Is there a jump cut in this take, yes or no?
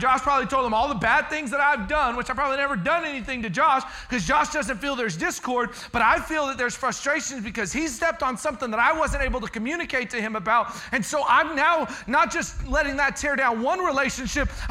no